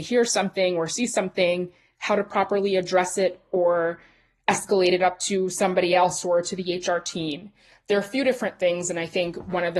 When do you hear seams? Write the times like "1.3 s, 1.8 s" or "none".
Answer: none

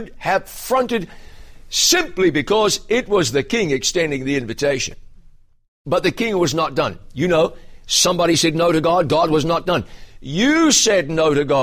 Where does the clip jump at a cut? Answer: none

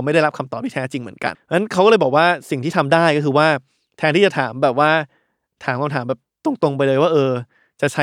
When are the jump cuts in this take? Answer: 1.3 s

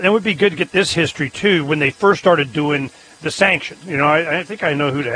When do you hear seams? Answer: 3.8 s

